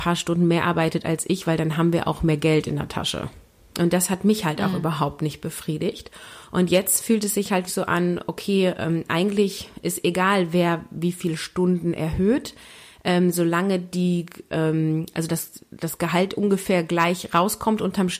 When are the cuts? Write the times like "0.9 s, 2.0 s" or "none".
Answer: 3.7 s, 7.7 s